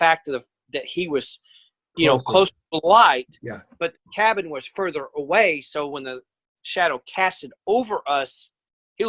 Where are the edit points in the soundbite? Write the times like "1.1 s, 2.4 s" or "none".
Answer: none